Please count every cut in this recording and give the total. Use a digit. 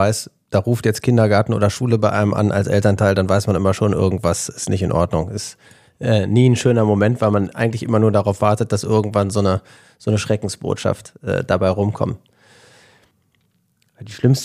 0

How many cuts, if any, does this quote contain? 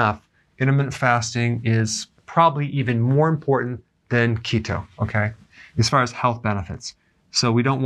0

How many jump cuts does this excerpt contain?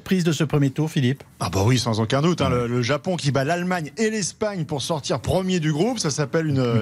1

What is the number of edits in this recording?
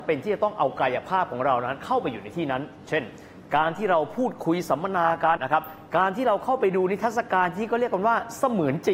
1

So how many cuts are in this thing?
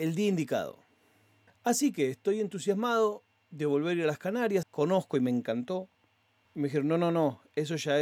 3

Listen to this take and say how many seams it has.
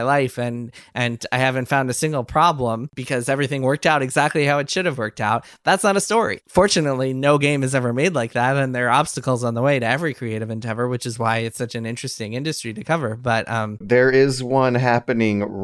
1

